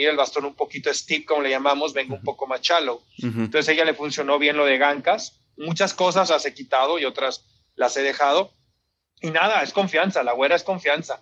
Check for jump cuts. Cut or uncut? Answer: cut